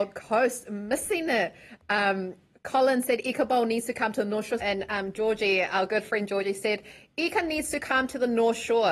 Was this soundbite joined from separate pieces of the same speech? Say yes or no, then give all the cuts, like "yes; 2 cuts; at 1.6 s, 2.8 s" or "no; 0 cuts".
yes; 1 cut; at 4.6 s